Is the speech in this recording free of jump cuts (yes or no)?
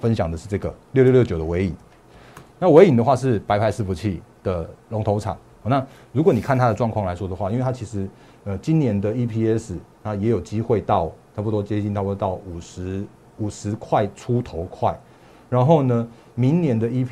yes